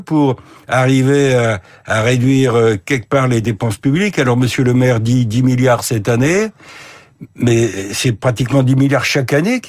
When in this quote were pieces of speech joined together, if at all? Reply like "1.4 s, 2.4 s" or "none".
none